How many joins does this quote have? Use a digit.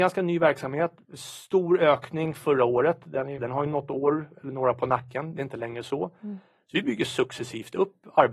1